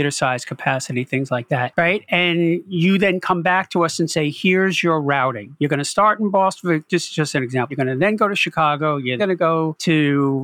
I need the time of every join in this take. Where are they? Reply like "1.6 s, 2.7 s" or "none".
7.7 s, 9.2 s